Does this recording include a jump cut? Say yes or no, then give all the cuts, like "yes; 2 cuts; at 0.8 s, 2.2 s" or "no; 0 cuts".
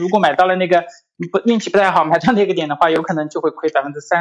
no; 0 cuts